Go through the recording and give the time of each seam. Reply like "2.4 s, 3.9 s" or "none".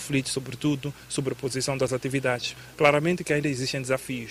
2.7 s